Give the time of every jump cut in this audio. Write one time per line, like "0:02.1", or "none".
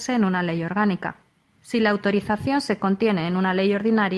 0:01.6